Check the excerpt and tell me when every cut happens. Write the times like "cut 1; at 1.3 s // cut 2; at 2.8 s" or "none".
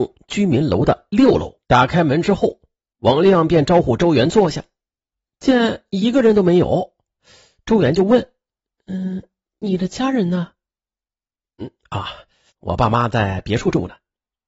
cut 1; at 1.6 s // cut 2; at 12.5 s